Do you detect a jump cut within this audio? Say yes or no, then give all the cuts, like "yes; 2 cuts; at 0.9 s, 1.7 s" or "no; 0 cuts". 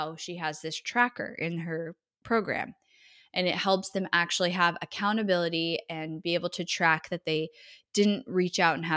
no; 0 cuts